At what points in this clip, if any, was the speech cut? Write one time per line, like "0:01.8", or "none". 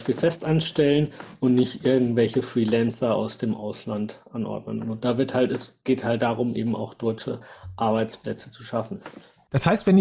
none